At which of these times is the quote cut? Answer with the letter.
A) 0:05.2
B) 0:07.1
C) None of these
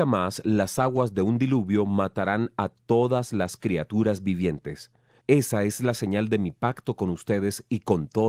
A